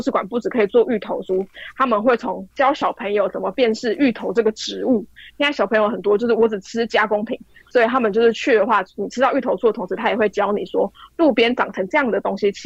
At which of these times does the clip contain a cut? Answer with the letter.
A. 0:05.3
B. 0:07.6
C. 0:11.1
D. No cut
B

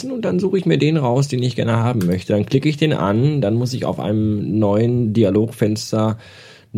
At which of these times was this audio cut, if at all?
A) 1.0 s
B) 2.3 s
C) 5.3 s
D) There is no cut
D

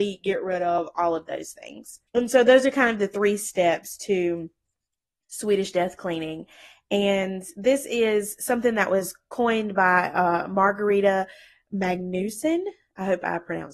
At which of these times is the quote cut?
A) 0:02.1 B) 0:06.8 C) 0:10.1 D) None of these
A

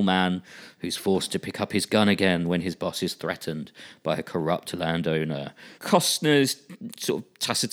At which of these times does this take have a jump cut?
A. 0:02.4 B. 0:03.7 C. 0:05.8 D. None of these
C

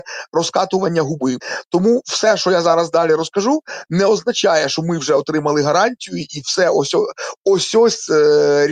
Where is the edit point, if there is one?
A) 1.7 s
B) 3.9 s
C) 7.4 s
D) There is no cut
D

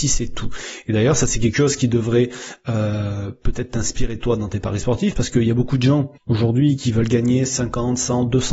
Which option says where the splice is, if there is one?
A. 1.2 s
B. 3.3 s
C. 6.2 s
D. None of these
C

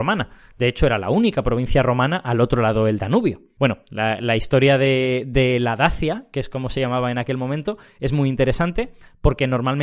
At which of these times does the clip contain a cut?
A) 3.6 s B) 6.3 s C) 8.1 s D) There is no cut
A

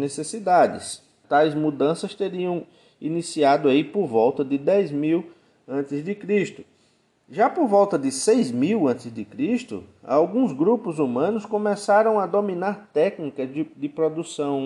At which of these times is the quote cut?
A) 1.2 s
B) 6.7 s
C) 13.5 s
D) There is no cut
A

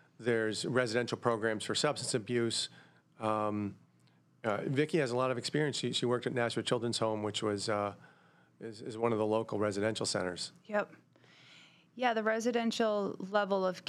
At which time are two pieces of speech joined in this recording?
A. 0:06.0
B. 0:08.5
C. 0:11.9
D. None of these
D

